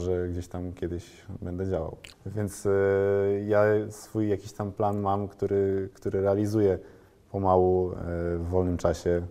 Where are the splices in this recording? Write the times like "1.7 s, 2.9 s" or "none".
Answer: 2.1 s

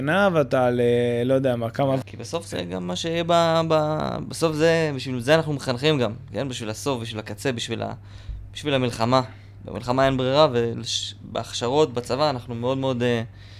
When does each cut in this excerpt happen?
2.0 s

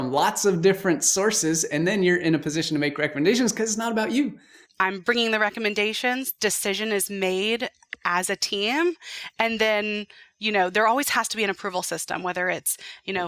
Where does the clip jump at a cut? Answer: 4.7 s

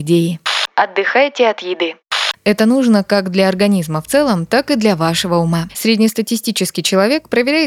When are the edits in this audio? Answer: 5.7 s

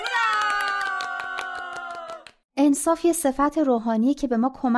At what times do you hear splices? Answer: 2.4 s

